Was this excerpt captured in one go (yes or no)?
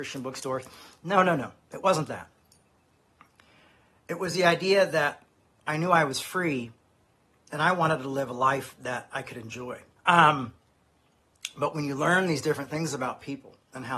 no